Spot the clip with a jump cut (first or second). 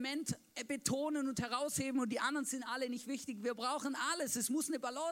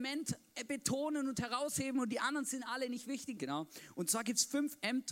second